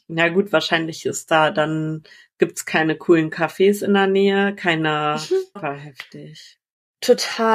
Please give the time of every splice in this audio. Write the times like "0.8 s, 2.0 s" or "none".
5.6 s

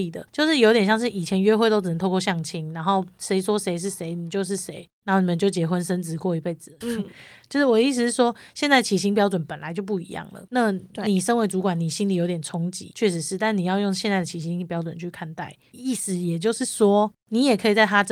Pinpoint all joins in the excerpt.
6.8 s, 15.7 s

